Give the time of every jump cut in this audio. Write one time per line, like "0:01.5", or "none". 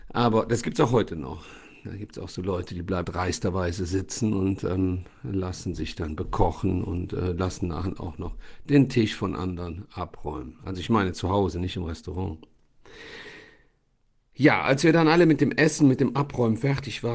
0:03.0